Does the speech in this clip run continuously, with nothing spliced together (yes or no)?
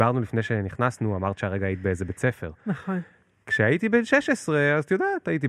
yes